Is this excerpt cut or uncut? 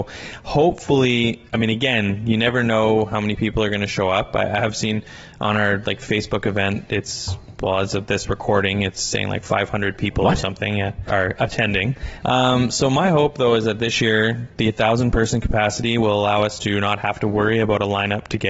cut